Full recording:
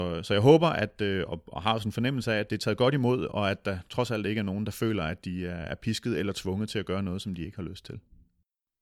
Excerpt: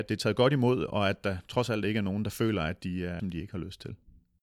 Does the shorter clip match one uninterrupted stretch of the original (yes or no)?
no